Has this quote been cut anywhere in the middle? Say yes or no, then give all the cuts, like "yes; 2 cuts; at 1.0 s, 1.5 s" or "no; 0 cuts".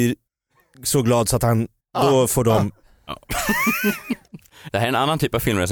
no; 0 cuts